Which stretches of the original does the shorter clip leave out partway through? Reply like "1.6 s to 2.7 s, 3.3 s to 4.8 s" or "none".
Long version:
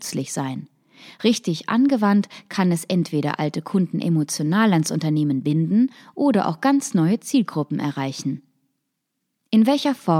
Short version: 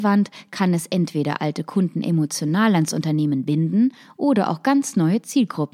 none